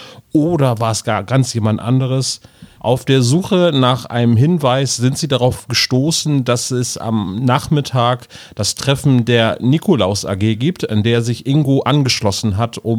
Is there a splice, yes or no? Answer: yes